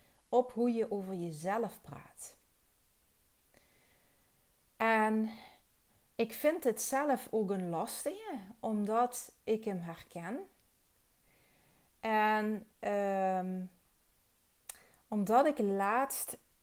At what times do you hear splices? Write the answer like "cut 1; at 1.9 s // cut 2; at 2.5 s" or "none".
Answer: cut 1; at 9.4 s // cut 2; at 12.7 s